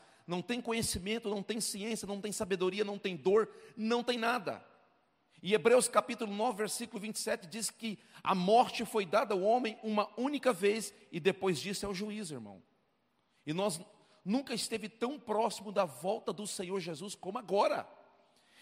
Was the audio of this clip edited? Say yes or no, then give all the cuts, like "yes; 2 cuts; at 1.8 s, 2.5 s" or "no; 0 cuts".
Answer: no; 0 cuts